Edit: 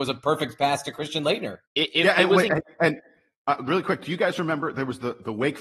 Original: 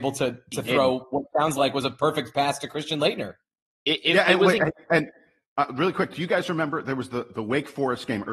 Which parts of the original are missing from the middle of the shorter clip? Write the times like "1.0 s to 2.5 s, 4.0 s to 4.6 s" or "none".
3.4 s to 3.8 s